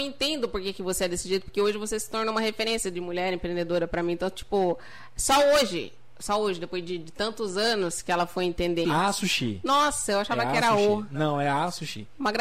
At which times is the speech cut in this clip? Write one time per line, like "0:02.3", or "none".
0:08.8